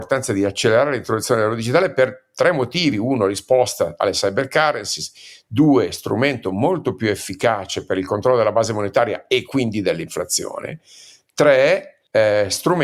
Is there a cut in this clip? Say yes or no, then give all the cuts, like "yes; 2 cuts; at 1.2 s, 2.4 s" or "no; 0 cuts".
no; 0 cuts